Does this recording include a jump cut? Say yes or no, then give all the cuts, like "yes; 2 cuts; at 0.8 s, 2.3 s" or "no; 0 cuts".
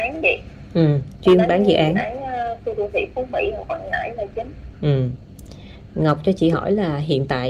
yes; 1 cut; at 4.7 s